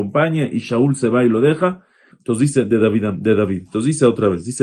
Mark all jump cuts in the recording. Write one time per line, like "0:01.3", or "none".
0:02.1